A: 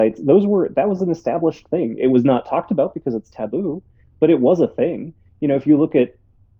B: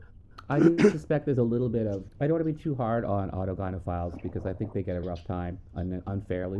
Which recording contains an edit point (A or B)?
B